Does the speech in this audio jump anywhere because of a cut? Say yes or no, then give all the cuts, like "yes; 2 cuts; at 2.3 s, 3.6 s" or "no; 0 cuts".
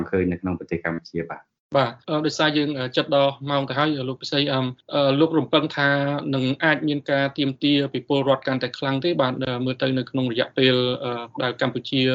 yes; 1 cut; at 2.0 s